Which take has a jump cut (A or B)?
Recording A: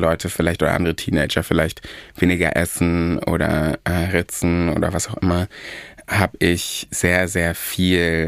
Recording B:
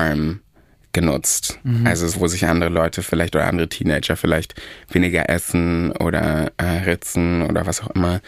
B